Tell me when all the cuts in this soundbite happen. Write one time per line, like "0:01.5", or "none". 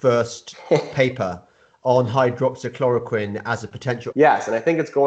0:04.1